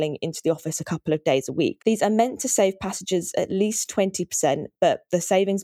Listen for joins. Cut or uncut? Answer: cut